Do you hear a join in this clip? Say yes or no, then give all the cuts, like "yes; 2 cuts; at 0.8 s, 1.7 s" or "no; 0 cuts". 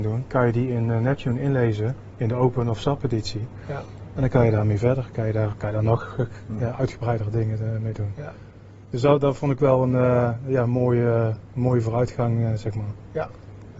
yes; 1 cut; at 5.5 s